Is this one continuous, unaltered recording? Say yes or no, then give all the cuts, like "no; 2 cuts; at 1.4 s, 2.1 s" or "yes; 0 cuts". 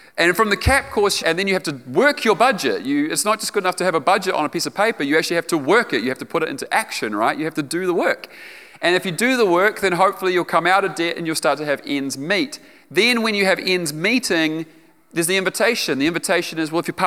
no; 1 cut; at 1.2 s